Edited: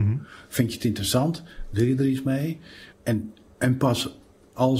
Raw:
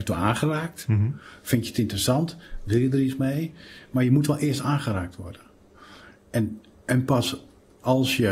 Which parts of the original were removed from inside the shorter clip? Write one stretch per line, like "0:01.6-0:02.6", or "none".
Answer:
0:03.9-0:06.2